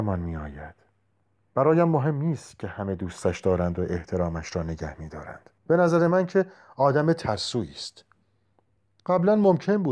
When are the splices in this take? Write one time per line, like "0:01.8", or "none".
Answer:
0:01.5
0:05.6